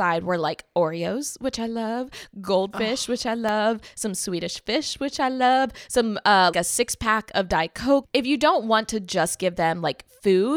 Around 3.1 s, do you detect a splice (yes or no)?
no